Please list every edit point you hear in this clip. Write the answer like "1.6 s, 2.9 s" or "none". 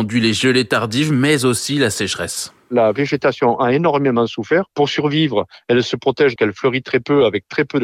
6.4 s